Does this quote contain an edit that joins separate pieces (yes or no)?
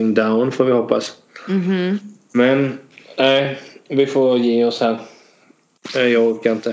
no